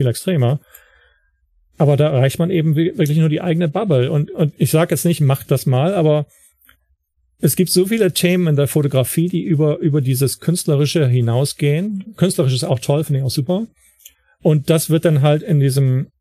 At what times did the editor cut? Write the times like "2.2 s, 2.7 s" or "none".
none